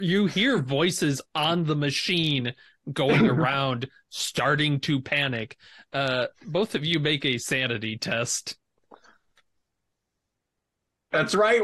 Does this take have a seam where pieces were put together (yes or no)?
no